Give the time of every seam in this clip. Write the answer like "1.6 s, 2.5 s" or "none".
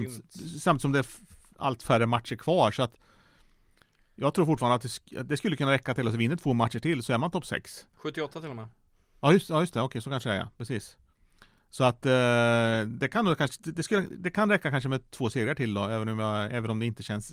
7.9 s